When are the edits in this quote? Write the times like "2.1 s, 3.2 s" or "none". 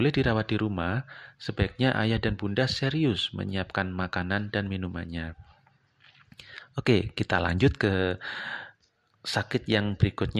none